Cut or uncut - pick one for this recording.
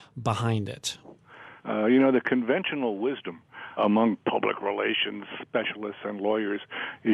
cut